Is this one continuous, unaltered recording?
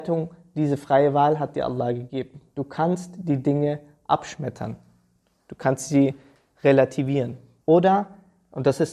no; 1 cut; at 7.6 s

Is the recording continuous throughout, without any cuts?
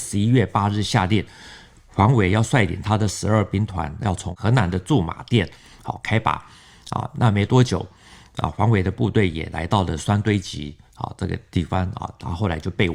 yes; 0 cuts

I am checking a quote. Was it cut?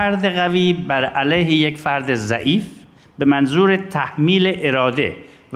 no; 0 cuts

